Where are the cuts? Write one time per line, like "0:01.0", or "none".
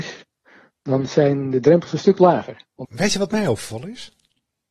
0:02.8